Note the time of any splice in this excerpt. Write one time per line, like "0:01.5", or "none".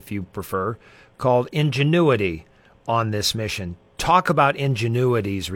none